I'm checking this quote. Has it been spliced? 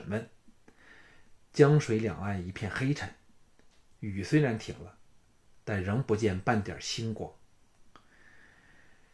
no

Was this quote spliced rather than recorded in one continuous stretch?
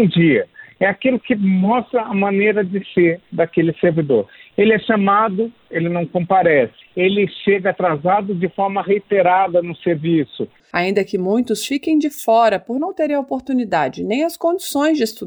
yes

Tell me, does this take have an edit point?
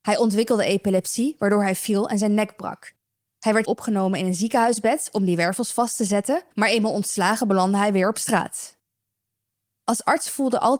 yes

